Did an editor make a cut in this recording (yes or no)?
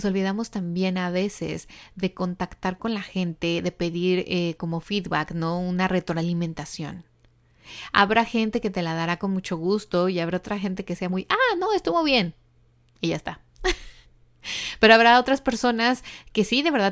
no